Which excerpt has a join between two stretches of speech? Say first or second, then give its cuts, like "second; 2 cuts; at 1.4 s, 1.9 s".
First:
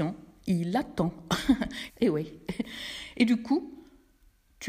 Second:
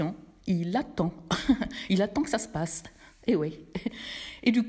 first; 1 cut; at 1.9 s